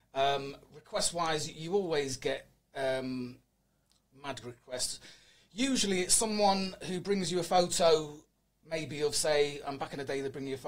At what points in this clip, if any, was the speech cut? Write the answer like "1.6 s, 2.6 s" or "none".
4.1 s